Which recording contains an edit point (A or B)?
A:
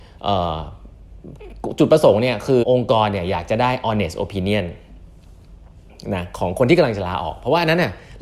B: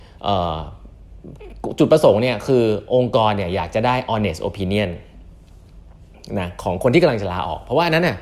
A